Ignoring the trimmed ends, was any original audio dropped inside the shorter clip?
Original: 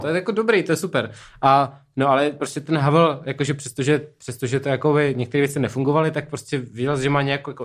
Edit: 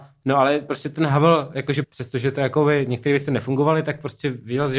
yes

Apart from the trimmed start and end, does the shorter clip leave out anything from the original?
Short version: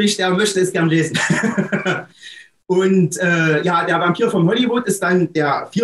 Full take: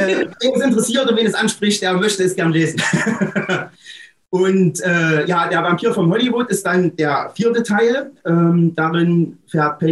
no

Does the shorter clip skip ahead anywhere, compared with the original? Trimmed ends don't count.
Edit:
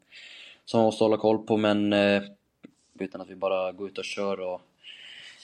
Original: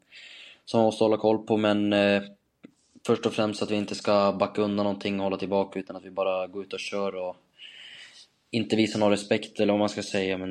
yes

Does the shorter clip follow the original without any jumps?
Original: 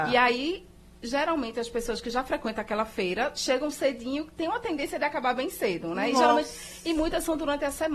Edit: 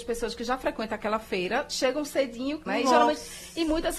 no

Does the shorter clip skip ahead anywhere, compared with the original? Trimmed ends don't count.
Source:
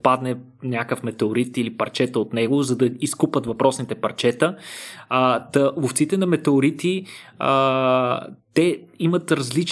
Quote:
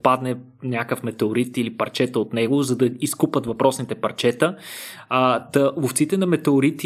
no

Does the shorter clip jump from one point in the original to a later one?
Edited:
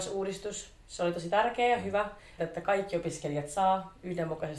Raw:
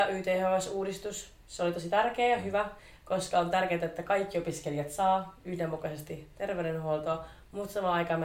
yes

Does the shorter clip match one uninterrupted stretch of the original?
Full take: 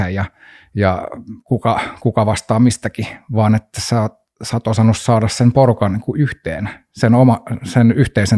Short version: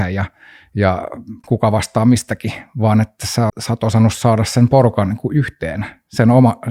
no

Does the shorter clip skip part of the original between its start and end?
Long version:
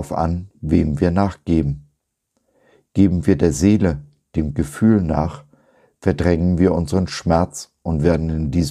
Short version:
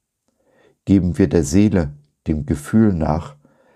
no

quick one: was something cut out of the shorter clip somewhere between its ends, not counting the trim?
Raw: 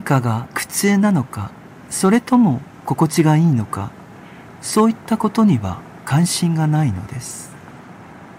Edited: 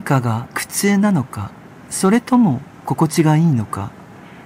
no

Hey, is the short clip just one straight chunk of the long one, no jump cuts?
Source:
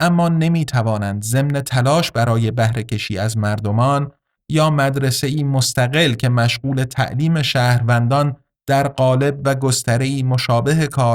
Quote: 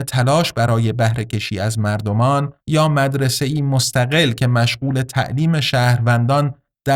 no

